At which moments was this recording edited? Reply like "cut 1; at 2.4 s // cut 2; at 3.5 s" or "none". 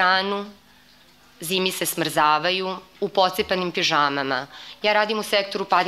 none